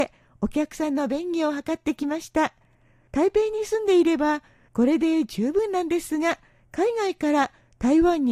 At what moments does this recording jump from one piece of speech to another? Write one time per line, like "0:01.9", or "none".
none